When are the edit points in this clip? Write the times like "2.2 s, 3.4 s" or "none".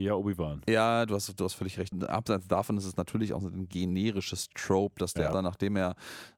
1.9 s, 5.3 s